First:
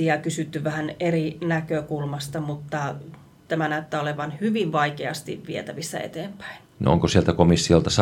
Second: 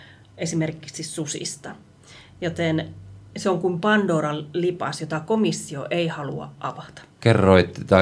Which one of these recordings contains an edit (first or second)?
second